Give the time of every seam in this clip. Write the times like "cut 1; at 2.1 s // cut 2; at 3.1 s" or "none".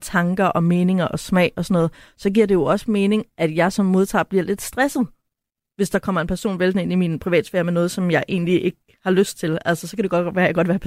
none